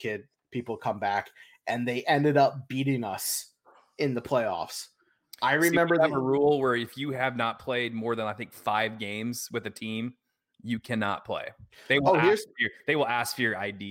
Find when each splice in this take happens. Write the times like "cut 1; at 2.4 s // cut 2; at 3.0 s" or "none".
none